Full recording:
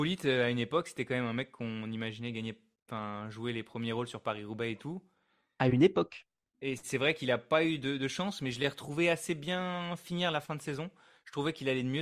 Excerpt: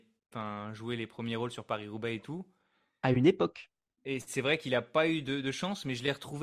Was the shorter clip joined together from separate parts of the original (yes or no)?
no